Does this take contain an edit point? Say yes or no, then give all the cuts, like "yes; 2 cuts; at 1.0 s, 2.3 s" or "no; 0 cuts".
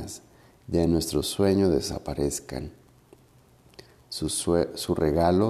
no; 0 cuts